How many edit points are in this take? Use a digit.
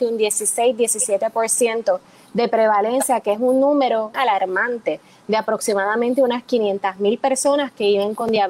1